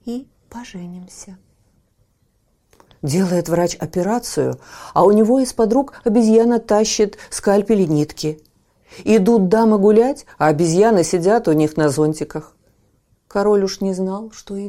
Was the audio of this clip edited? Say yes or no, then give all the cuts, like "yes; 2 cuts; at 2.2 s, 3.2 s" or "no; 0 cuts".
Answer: yes; 1 cut; at 2.9 s